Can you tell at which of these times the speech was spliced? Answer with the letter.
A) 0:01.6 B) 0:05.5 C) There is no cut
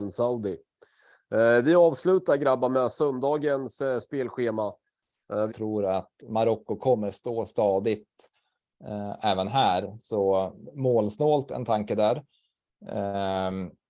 B